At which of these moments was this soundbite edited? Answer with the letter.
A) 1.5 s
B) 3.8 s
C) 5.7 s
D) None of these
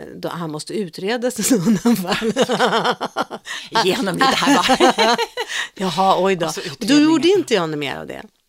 D